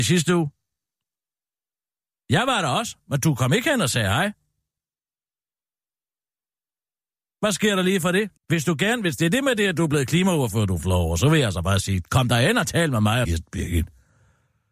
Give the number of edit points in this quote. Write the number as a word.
two